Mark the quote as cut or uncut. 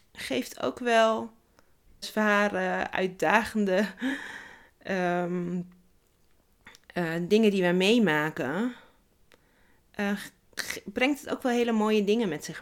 cut